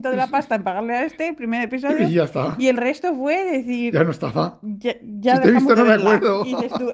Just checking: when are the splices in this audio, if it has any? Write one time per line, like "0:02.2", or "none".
none